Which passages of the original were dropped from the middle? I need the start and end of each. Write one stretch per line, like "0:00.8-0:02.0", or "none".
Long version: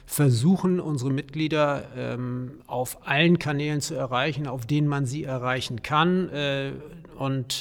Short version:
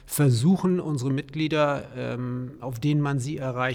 0:02.6-0:04.5